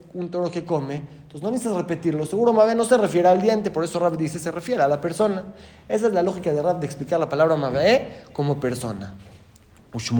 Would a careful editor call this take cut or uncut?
uncut